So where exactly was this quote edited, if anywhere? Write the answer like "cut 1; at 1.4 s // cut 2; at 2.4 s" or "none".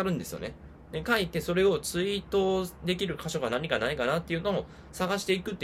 cut 1; at 0.9 s